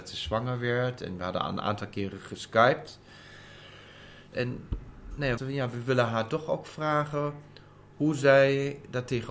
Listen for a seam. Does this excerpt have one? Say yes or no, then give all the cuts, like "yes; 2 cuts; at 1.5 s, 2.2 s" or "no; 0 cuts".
yes; 2 cuts; at 4.3 s, 5.4 s